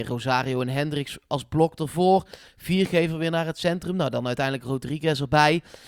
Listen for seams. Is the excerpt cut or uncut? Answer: uncut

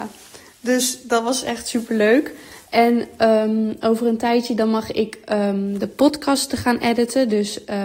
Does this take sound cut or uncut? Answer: uncut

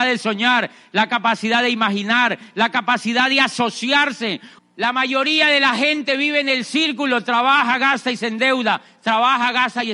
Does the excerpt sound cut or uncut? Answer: cut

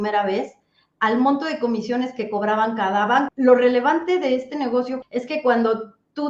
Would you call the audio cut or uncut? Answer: cut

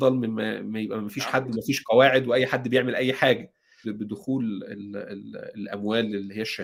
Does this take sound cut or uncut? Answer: cut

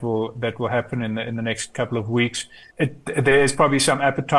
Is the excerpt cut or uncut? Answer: cut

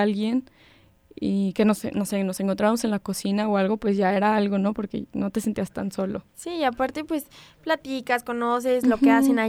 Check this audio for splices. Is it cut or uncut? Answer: uncut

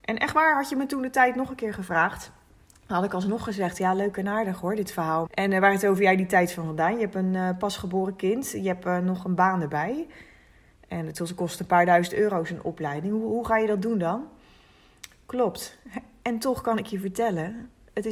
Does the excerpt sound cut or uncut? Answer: cut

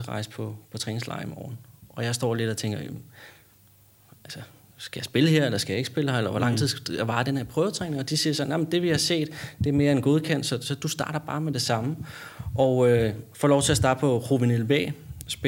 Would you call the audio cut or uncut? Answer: uncut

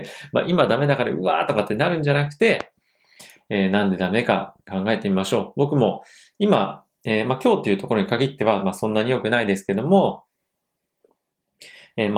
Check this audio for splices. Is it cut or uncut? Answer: uncut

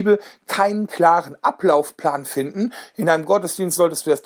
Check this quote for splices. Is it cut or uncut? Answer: uncut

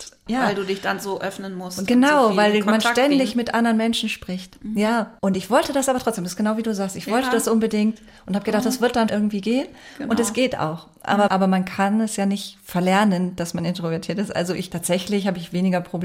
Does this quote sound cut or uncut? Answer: cut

